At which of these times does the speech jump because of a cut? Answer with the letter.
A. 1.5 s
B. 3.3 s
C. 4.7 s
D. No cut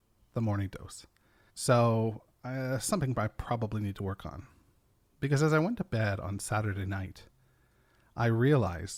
A